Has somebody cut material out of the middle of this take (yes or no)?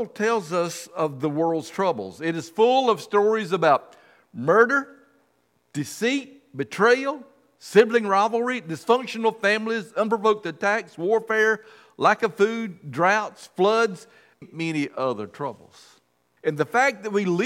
yes